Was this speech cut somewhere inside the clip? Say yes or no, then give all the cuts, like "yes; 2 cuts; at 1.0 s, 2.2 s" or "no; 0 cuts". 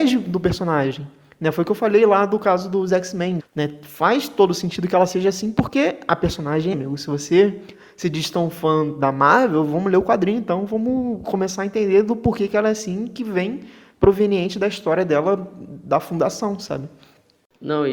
yes; 2 cuts; at 3.4 s, 6.7 s